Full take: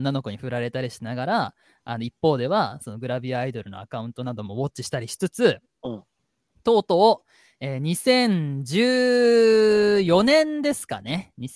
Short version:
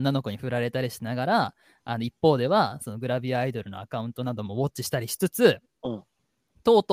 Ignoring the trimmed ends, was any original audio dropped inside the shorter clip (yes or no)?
no